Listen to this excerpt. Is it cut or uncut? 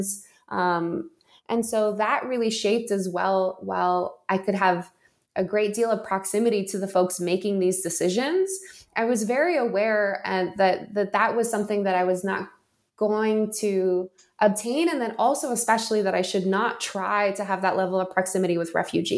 uncut